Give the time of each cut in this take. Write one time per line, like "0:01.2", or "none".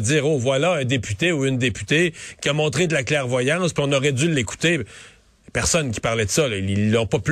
none